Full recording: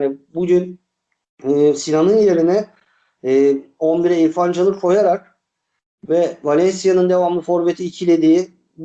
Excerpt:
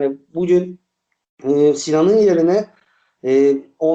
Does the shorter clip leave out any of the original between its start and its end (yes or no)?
no